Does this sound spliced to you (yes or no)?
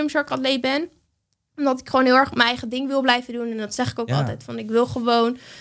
no